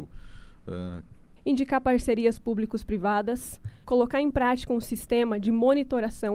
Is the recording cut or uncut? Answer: cut